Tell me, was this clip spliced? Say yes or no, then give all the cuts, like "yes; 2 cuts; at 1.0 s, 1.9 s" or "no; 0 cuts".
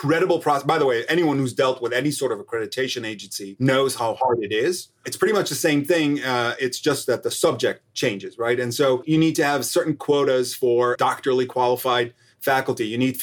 no; 0 cuts